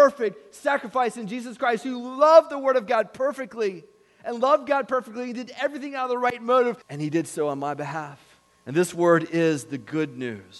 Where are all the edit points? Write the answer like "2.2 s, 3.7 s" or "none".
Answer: 6.8 s, 8.5 s